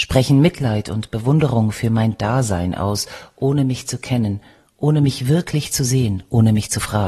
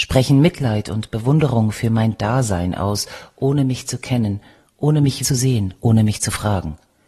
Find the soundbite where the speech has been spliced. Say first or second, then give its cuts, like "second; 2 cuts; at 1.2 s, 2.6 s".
second; 1 cut; at 5.2 s